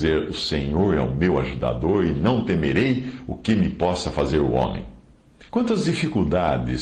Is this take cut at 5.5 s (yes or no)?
yes